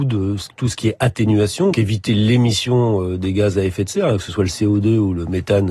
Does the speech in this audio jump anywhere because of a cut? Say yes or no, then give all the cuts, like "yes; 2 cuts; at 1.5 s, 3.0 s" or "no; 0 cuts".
yes; 1 cut; at 1.7 s